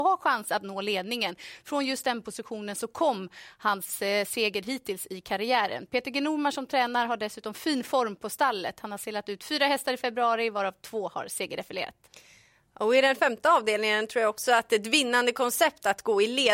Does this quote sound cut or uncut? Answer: uncut